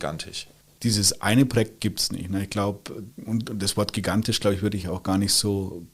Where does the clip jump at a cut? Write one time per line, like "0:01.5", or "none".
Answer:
0:03.1